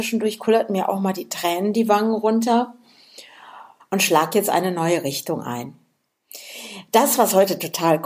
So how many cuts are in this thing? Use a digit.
1